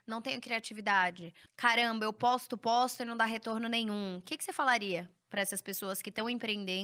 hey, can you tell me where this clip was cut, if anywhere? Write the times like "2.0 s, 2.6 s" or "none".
1.5 s